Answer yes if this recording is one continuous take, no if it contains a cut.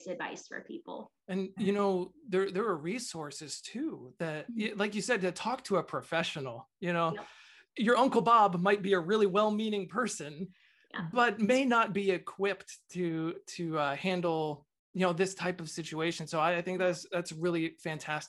no